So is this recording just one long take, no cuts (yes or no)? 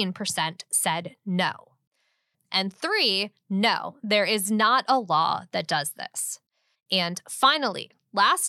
no